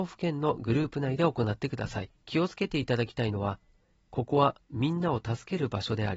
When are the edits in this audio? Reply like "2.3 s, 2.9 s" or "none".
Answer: 2.2 s